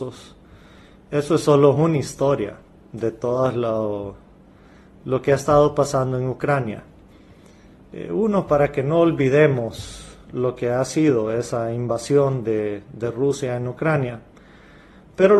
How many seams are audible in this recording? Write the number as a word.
zero